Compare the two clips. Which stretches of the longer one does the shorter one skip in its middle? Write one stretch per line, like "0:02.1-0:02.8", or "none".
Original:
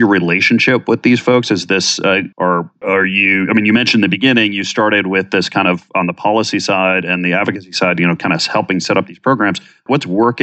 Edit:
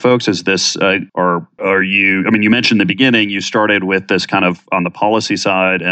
none